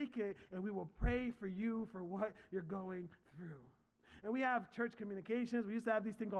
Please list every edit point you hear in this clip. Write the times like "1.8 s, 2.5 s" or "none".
none